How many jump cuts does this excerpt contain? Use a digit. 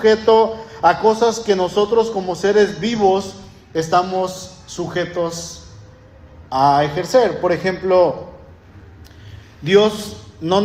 1